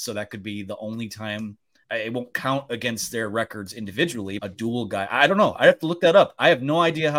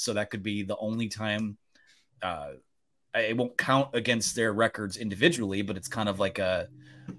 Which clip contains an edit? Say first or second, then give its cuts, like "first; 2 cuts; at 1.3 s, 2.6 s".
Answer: first; 2 cuts; at 1.8 s, 4.4 s